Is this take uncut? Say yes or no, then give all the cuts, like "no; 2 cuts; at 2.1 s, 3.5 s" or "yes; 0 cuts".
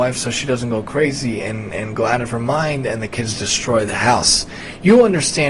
yes; 0 cuts